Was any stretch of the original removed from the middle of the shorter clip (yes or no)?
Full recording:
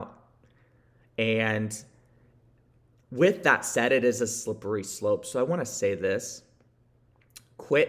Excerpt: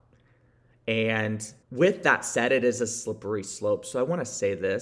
yes